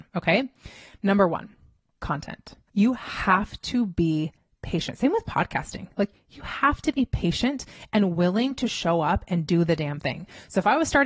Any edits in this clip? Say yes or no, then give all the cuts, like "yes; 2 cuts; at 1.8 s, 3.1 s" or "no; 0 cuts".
yes; 1 cut; at 2.7 s